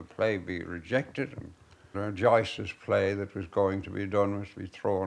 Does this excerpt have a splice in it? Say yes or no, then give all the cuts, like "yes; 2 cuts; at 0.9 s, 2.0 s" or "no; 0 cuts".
yes; 1 cut; at 1.9 s